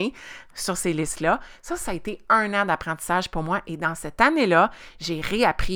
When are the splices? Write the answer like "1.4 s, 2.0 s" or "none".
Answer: none